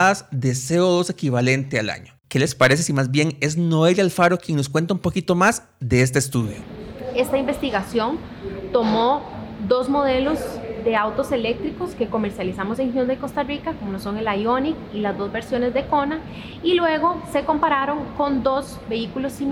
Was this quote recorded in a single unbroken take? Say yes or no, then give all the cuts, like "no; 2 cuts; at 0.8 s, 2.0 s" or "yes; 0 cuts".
yes; 0 cuts